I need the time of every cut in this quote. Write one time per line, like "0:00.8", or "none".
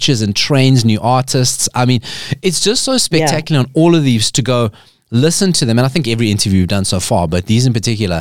none